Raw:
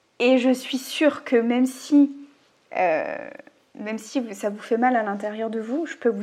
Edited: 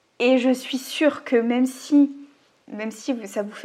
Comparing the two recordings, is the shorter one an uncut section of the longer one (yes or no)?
no